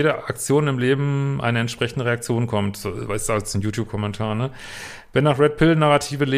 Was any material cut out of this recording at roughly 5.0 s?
no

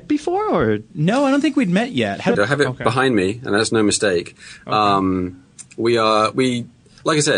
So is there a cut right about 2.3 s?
yes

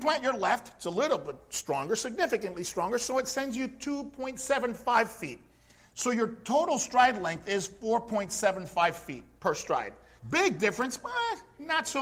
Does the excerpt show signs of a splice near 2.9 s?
no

